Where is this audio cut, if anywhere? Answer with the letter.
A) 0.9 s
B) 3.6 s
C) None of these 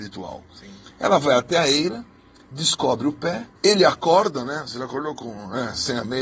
B